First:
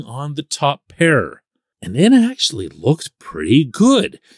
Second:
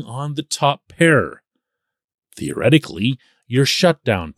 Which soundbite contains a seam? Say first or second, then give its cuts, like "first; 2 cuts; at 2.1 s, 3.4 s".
first; 1 cut; at 1.7 s